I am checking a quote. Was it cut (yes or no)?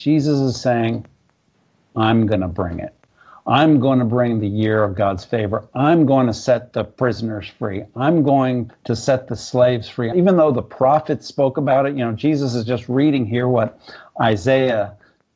yes